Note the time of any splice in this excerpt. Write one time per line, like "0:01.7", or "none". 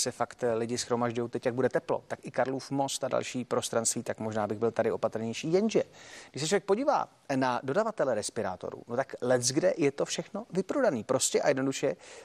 none